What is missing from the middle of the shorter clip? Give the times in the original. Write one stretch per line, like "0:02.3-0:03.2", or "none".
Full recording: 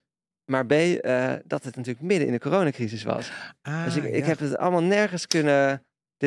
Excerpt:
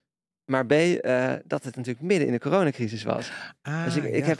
none